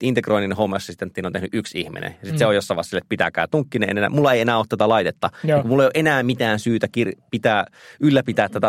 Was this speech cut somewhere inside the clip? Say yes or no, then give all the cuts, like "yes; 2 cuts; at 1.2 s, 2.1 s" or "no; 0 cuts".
no; 0 cuts